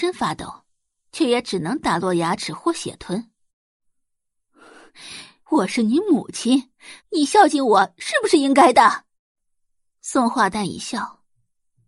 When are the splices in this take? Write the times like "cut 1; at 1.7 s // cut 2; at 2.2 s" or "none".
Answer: cut 1; at 5.4 s // cut 2; at 7.0 s // cut 3; at 10.5 s